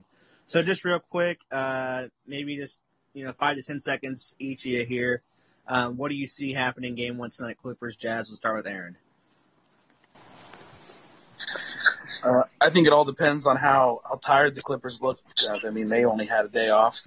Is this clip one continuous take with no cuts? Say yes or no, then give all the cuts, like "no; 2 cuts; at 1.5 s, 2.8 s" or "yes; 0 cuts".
yes; 0 cuts